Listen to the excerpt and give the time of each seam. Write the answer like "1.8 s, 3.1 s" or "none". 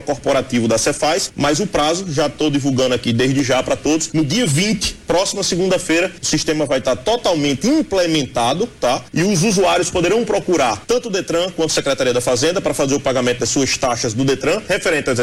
none